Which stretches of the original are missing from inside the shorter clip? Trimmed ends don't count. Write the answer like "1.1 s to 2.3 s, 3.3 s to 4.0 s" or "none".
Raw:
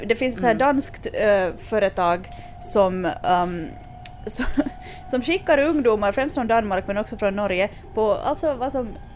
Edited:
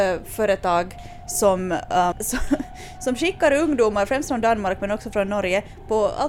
3.5 s to 4.2 s